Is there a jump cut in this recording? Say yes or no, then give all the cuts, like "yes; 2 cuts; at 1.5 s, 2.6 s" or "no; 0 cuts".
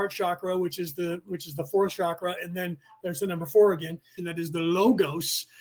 yes; 1 cut; at 4.2 s